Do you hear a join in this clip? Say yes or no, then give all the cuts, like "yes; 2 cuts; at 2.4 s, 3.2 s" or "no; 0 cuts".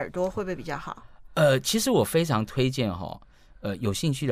no; 0 cuts